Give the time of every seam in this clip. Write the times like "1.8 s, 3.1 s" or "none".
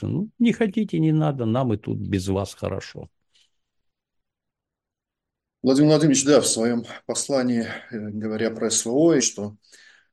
9.2 s